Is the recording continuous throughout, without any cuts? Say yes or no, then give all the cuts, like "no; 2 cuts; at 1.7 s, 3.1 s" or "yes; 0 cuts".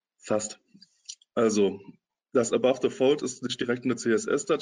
yes; 0 cuts